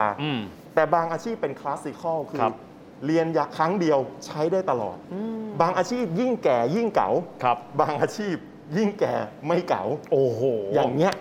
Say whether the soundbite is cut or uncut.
uncut